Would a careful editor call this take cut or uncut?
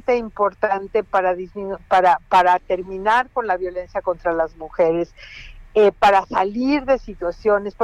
uncut